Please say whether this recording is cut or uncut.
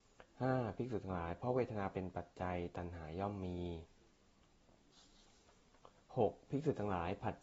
uncut